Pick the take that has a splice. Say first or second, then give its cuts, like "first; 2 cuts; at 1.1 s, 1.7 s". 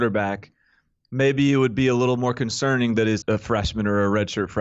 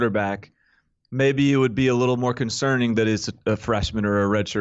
first; 1 cut; at 3.2 s